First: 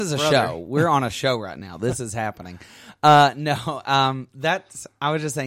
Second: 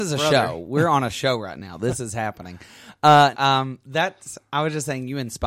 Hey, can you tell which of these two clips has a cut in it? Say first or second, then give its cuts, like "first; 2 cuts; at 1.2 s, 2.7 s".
second; 1 cut; at 3.3 s